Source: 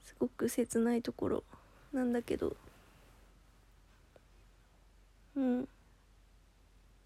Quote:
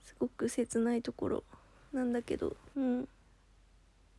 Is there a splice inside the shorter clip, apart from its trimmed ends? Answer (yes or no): yes